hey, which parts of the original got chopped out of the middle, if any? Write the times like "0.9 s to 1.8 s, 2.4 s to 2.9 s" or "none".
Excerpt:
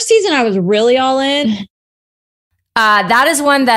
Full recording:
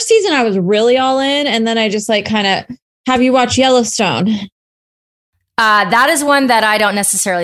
1.4 s to 4.3 s